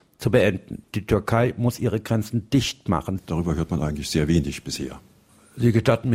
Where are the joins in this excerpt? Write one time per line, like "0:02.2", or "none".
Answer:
0:03.2